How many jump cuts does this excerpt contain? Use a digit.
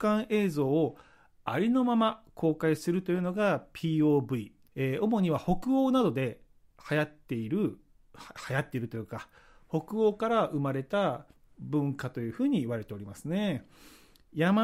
1